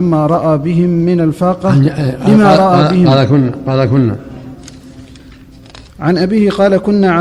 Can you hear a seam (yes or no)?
yes